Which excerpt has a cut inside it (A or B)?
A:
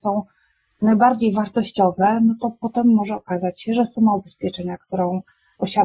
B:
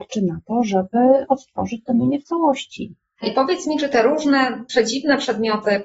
B